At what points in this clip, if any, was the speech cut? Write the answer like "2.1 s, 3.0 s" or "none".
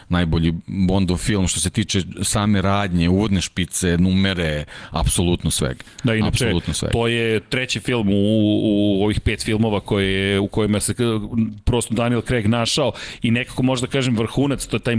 none